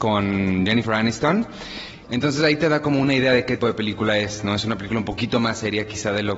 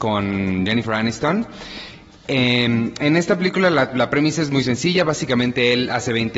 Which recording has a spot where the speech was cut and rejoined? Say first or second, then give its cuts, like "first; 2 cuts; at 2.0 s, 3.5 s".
first; 2 cuts; at 2.0 s, 3.6 s